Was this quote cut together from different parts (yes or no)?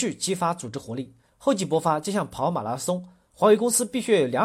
yes